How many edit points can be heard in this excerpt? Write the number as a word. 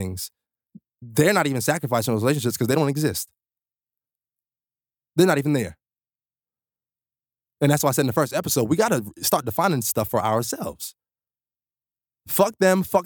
zero